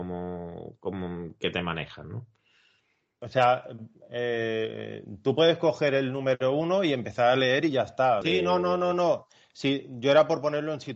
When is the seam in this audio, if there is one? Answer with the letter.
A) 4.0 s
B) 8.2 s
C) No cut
B